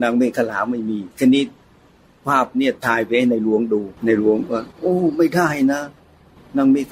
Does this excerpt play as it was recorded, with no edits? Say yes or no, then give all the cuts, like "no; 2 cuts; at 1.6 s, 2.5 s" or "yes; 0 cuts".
no; 2 cuts; at 1.1 s, 4.0 s